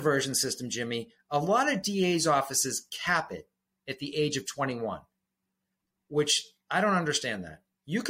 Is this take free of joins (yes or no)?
yes